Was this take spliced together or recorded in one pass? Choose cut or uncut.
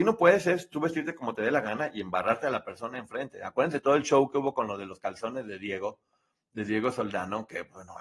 uncut